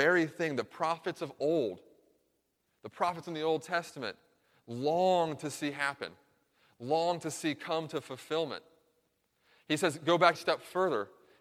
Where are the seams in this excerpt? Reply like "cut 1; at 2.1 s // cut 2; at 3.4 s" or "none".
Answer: cut 1; at 10.3 s